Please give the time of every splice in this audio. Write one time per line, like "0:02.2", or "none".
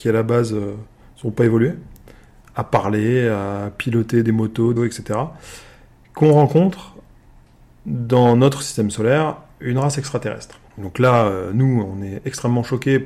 0:04.8
0:10.7